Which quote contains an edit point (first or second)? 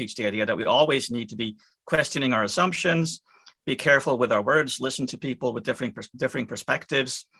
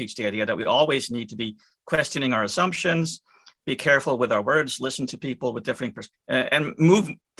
second